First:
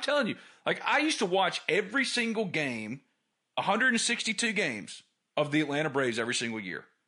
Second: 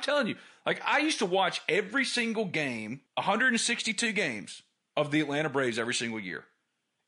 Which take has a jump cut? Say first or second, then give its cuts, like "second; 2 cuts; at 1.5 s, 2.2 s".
second; 1 cut; at 3.1 s